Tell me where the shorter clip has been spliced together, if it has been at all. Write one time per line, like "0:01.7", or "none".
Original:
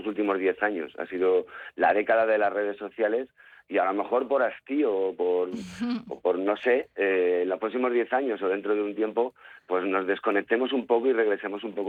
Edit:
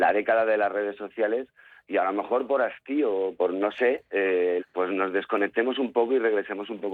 0:03.3
0:04.6

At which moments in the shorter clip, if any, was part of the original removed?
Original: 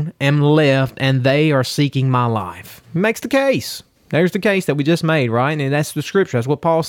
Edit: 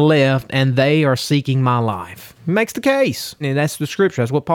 0:03.4

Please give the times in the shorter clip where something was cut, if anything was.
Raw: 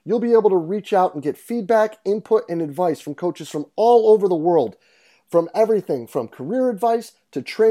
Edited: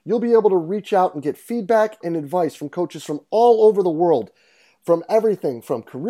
0:02.0

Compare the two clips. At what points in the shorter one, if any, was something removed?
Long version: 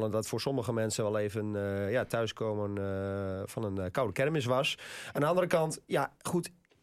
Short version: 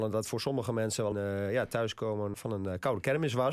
0:01.1
0:02.3

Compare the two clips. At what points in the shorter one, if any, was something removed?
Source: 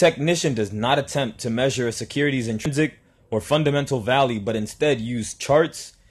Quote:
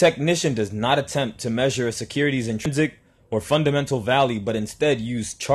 none

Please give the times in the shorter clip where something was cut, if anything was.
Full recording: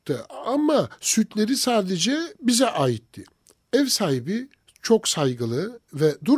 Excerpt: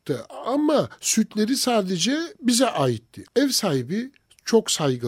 0:03.3

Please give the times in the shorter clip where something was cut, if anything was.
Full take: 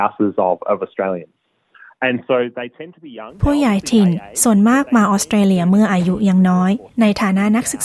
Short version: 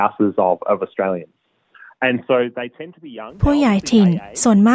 none

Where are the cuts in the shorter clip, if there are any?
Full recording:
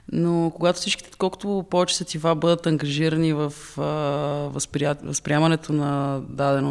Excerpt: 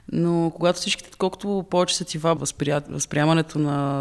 0:02.4

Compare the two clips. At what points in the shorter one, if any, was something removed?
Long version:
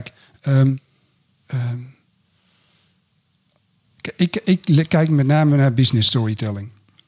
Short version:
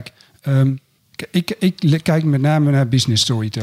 0:01.0

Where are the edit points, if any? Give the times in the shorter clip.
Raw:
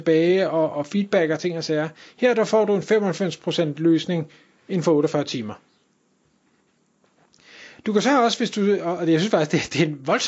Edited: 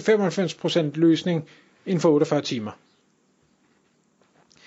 none

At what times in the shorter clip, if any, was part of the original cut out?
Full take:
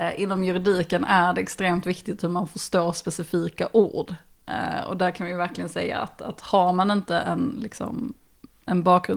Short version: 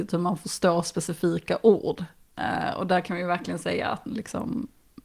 0:04.1

